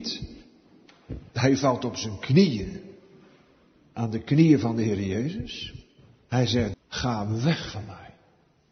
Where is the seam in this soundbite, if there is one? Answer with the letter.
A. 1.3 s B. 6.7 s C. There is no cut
B